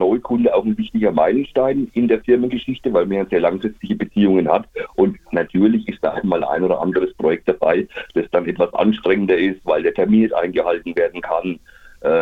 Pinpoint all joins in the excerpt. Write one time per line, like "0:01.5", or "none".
none